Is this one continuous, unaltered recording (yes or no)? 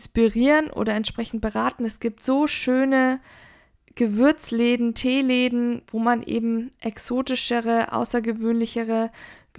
yes